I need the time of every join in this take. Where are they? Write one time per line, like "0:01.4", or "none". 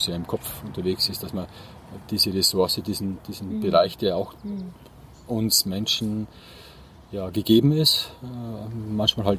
none